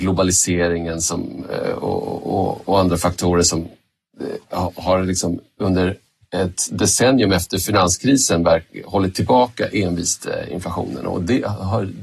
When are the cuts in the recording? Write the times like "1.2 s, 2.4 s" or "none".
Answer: none